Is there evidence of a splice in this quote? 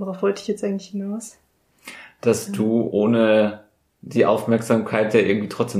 no; 0 cuts

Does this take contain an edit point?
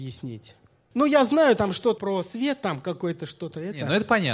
yes; 2 cuts; at 0.9 s, 2.0 s

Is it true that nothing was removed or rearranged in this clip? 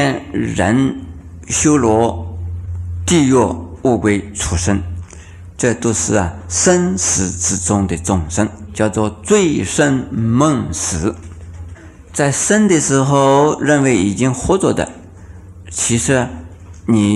yes; 0 cuts

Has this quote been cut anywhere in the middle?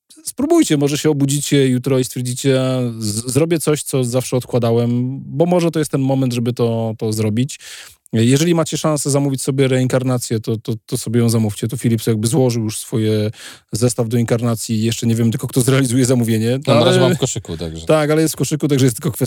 no; 0 cuts

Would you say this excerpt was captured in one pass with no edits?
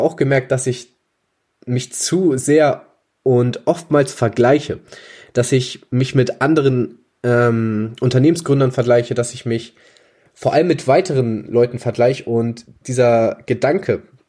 no; 1 cut; at 12.8 s

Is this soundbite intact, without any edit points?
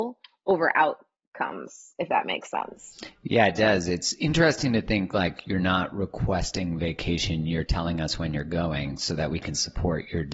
yes; 0 cuts

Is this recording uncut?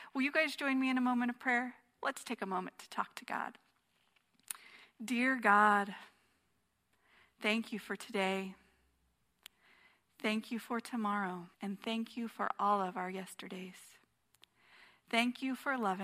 no; 1 cut; at 11.5 s

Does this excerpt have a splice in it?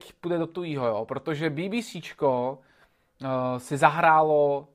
no; 0 cuts

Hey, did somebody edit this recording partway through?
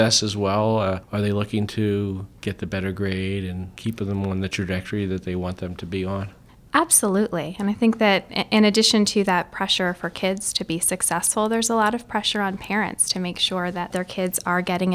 no; 0 cuts

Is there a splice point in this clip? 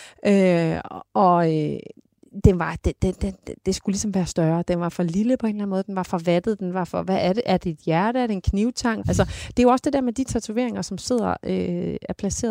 yes; 1 cut; at 9.0 s

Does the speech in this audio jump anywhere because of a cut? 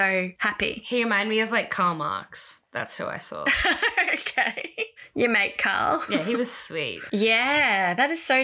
yes; 1 cut; at 7.1 s

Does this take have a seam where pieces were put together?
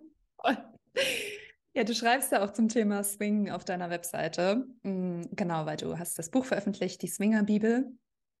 no; 0 cuts

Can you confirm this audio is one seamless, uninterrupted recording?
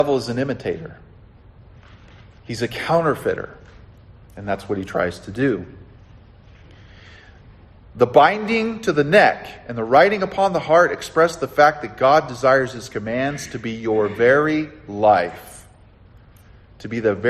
yes; 0 cuts

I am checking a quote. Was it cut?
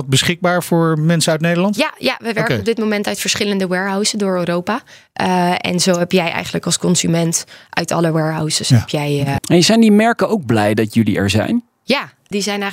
yes; 1 cut; at 9.4 s

